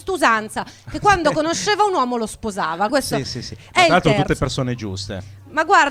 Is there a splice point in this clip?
yes; 1 cut; at 2.9 s

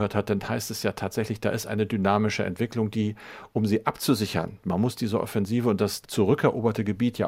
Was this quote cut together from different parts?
yes; 2 cuts; at 4.6 s, 6.0 s

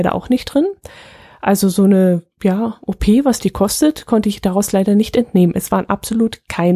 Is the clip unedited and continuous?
yes; 0 cuts

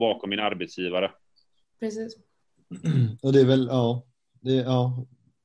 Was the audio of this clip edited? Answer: no; 0 cuts

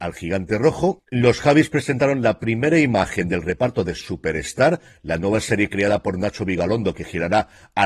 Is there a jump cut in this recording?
yes; 1 cut; at 1.0 s

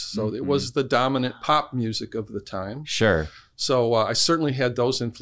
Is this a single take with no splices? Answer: yes; 0 cuts

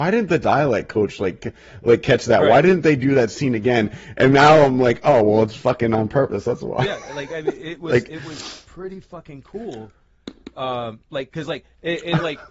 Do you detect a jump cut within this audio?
no; 0 cuts

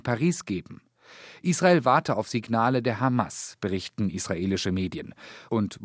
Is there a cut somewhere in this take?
no; 0 cuts

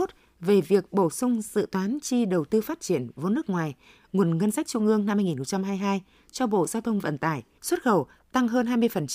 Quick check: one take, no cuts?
no; 1 cut; at 7.6 s

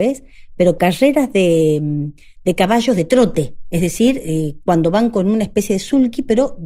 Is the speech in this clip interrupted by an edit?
no; 0 cuts

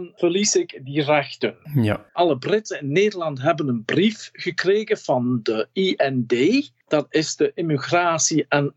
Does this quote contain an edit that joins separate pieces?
no; 0 cuts

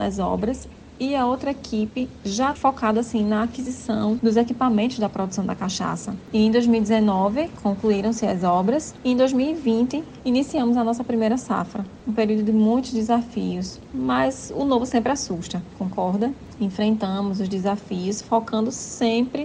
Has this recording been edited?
yes; 1 cut; at 10.2 s

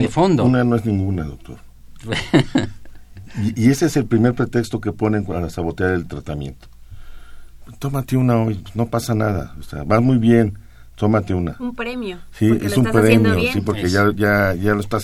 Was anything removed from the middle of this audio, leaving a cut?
no; 0 cuts

